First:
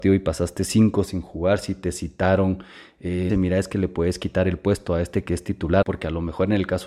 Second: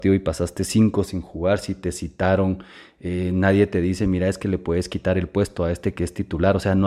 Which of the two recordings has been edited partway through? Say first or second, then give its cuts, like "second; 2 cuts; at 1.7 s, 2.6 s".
first; 2 cuts; at 3.3 s, 5.8 s